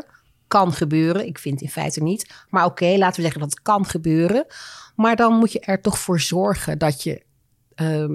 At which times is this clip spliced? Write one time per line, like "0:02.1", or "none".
none